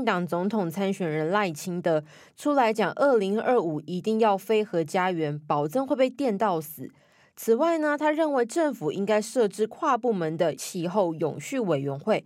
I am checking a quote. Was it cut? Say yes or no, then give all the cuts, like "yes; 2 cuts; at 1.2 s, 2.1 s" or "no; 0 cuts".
no; 0 cuts